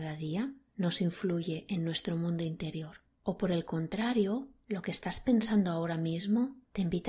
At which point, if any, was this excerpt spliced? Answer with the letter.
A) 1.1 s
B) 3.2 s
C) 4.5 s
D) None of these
B